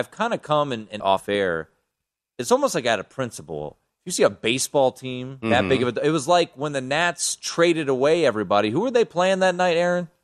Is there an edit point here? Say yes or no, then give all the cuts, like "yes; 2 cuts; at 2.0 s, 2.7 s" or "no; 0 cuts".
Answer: yes; 1 cut; at 1.0 s